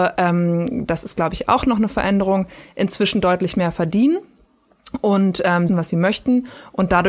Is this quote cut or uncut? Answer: cut